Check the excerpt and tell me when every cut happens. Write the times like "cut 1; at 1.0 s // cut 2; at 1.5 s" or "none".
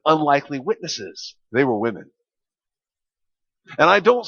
cut 1; at 1.4 s

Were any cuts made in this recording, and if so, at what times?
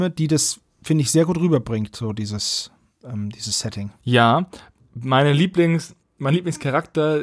cut 1; at 4.0 s

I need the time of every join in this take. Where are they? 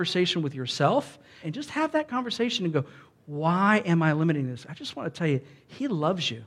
cut 1; at 1.4 s

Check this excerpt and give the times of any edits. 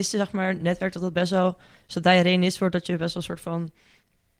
none

